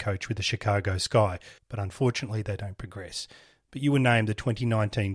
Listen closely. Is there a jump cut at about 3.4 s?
no; 1 cut; at 1.6 s

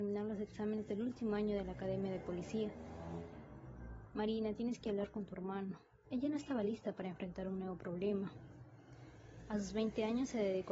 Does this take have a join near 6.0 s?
yes; 1 cut; at 6.0 s

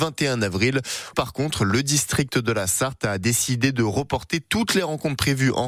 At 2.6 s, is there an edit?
no; 1 cut; at 1.1 s

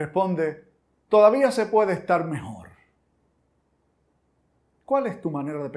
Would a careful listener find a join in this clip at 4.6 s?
no; 0 cuts

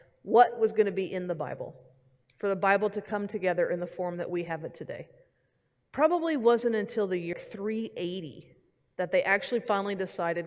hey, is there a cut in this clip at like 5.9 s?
no; 1 cut; at 7.3 s

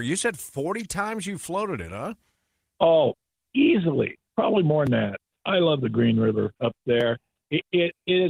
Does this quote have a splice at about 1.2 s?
no; 2 cuts; at 4.3 s, 6.6 s

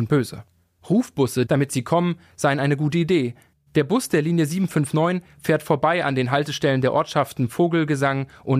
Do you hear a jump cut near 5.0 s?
no; 2 cuts; at 1.5 s, 3.5 s

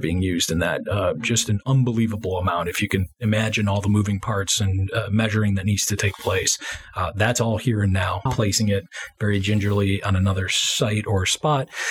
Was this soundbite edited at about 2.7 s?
no; 1 cut; at 8.3 s

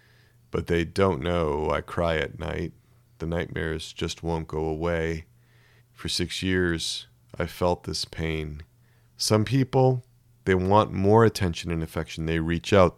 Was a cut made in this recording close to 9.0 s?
yes; 2 cuts; at 5.8 s, 9.0 s

